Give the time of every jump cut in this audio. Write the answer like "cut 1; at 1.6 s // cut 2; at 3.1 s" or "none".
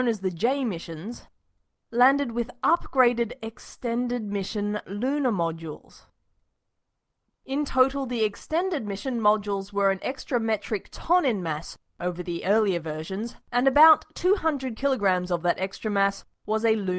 cut 1; at 7.3 s // cut 2; at 13.4 s